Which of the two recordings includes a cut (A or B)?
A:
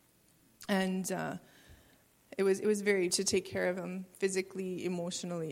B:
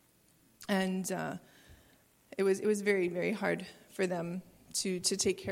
A